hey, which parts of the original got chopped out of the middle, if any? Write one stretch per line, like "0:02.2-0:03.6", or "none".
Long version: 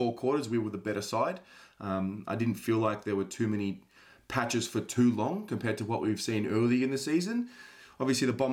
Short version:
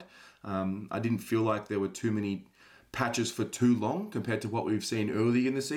none